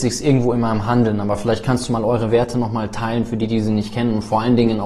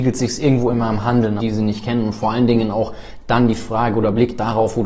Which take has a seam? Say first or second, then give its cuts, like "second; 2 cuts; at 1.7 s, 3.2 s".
second; 1 cut; at 1.4 s